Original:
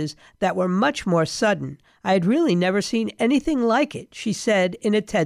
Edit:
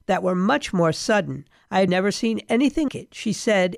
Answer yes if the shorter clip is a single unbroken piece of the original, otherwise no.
no